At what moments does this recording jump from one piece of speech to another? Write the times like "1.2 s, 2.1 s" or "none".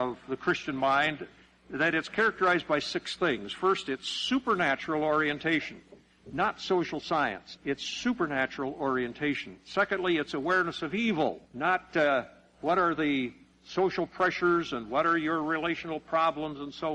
7.6 s, 11.4 s